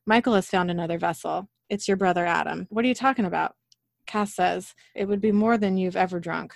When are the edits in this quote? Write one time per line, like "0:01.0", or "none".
0:02.7
0:04.9